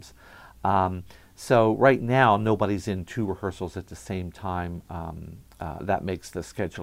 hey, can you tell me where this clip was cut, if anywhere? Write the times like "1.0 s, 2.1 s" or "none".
5.8 s